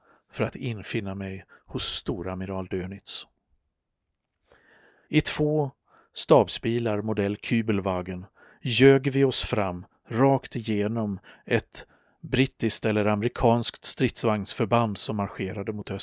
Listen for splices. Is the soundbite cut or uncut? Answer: cut